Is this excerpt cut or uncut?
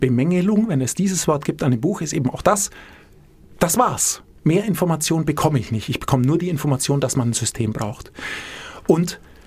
uncut